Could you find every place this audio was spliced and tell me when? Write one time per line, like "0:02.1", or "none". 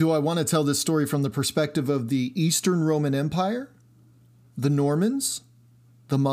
none